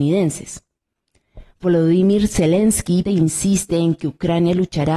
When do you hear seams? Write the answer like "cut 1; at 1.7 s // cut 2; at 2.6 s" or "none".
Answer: cut 1; at 3.0 s